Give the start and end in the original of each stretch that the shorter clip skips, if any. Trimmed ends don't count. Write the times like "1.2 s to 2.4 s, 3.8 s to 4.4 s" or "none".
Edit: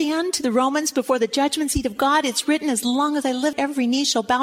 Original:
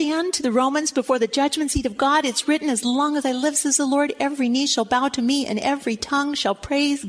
3.5 s to 4.1 s